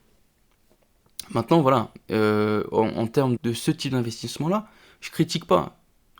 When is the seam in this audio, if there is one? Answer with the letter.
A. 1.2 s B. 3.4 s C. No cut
B